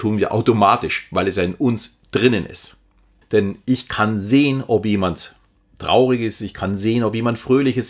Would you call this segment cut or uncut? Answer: cut